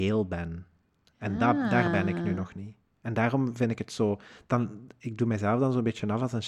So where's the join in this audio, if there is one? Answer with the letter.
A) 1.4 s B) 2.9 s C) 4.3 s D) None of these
D